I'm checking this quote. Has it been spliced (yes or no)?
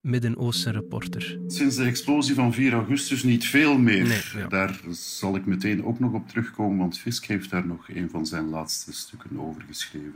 no